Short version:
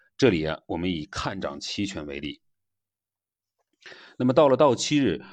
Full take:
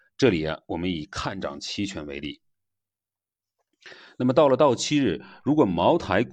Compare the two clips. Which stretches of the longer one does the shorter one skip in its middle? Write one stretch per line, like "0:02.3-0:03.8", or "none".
none

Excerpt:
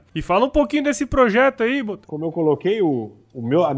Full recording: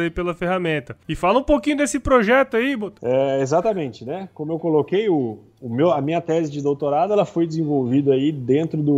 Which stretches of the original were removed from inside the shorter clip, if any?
0:03.0-0:04.3

